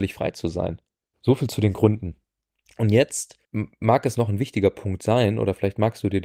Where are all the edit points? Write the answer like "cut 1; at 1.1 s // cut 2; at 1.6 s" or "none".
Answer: cut 1; at 1.1 s // cut 2; at 3.4 s